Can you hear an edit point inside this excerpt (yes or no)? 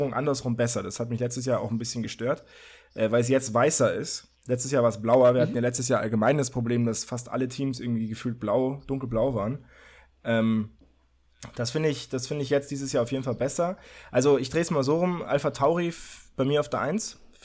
no